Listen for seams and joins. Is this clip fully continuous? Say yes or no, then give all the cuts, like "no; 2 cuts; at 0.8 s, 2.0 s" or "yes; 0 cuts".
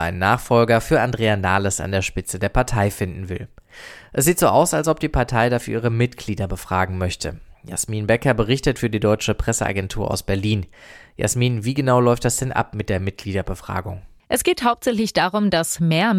yes; 0 cuts